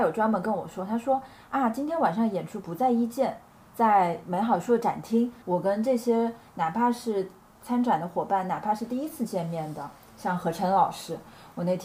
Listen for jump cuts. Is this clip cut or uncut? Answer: cut